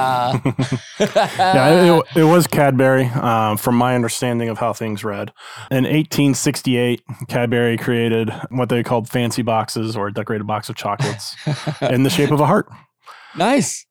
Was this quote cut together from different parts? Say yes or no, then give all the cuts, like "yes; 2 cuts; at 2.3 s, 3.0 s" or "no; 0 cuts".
no; 0 cuts